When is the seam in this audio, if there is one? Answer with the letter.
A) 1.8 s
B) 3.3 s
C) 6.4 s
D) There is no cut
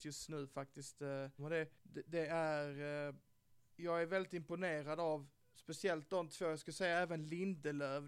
A